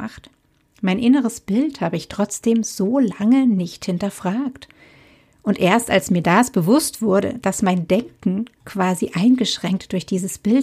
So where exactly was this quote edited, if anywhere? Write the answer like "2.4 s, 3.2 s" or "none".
none